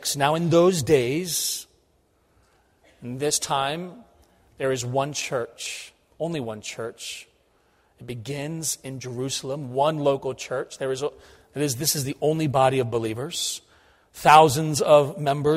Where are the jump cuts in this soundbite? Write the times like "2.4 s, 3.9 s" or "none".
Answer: none